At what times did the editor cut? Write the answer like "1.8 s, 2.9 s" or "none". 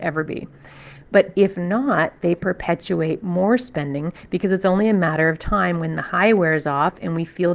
1.0 s

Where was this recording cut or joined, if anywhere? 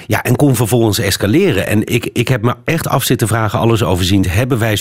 none

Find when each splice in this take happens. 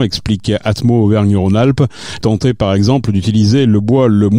2.2 s

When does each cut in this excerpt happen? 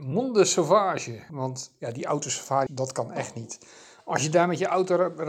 1.3 s, 2.7 s

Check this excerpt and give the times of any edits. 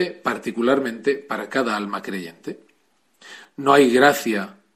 3.5 s

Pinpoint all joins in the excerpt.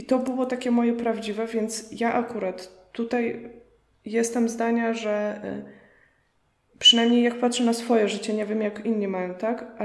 none

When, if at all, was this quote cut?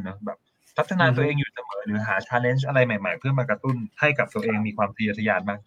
3.9 s

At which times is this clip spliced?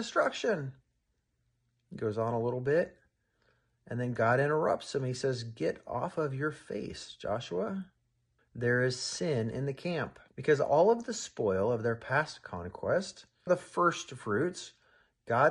8.4 s, 10.3 s, 13.5 s

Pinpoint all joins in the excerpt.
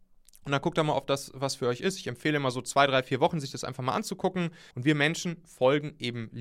4.7 s

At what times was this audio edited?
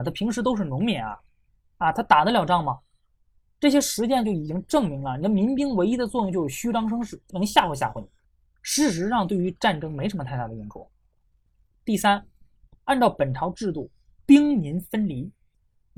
7.2 s

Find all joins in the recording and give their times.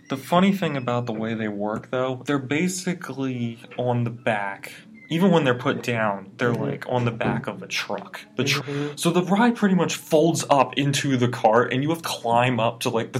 2.2 s, 8.6 s, 12.0 s

